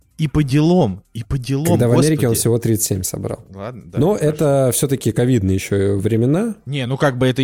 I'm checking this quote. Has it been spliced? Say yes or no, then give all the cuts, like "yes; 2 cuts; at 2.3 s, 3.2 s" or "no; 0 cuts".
no; 0 cuts